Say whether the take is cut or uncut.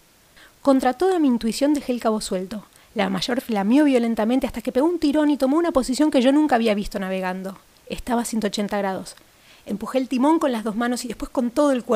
uncut